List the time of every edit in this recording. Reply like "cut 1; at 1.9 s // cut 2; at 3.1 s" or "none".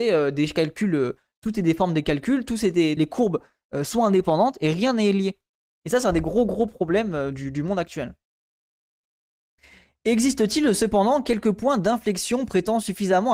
cut 1; at 3.0 s